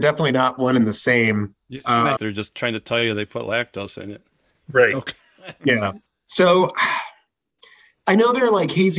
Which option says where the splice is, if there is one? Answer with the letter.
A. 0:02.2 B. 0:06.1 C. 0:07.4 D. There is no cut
A